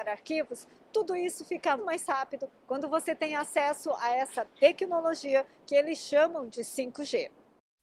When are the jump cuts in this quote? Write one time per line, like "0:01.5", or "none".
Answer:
0:01.8